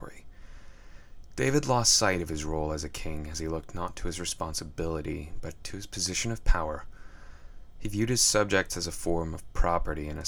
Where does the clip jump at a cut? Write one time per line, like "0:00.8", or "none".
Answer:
none

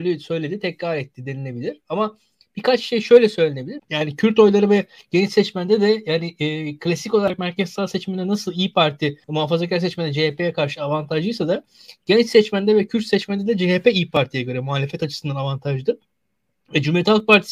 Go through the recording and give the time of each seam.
0:03.8
0:09.2

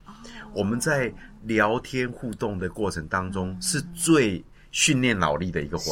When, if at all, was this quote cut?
none

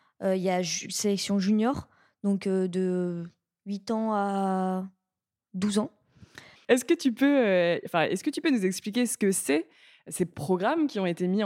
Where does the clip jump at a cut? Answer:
0:06.6

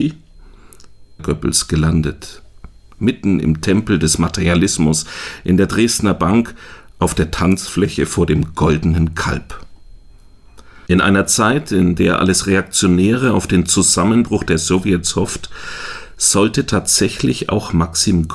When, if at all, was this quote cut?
0:01.2
0:10.9

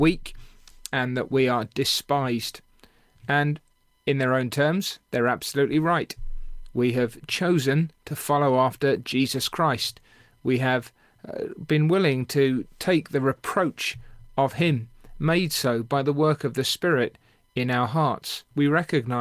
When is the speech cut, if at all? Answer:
none

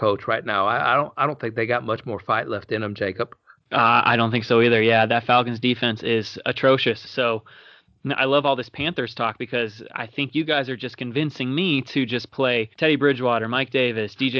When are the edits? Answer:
0:07.1
0:12.7

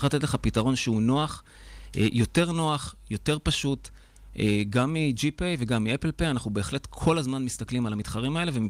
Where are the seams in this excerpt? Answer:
none

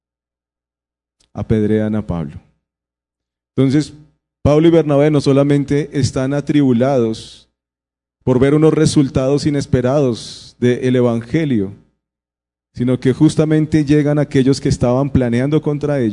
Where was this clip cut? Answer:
0:12.5

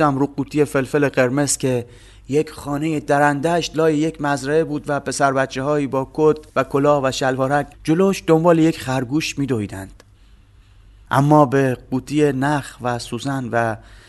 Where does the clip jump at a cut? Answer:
0:06.5
0:07.7

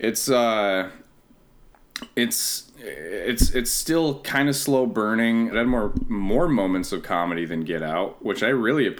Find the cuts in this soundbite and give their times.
0:05.5

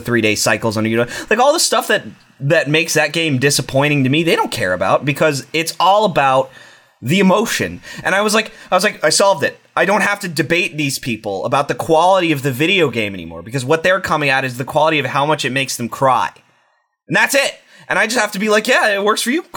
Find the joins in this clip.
none

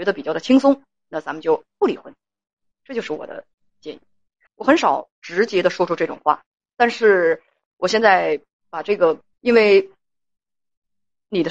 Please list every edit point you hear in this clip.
0:04.5
0:09.3

